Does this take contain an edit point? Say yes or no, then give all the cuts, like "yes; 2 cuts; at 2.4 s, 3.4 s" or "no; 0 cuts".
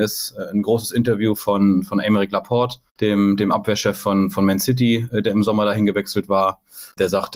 yes; 1 cut; at 2.9 s